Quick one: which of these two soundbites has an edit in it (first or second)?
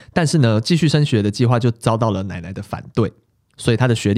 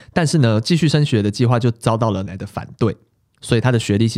second